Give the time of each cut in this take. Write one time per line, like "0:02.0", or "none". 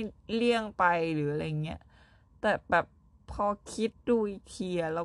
0:03.9